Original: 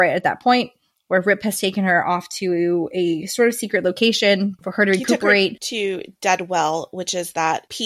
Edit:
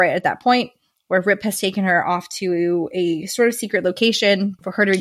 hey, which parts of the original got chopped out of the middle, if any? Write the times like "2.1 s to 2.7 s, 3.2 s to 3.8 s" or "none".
none